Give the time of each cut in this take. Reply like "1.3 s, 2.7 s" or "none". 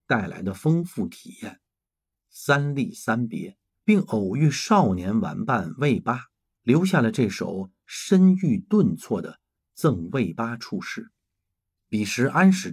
2.1 s